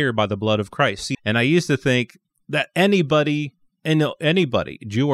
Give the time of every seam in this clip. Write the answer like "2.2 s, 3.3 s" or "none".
1.1 s